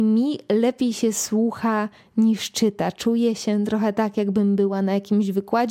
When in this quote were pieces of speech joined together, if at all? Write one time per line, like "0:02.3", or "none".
none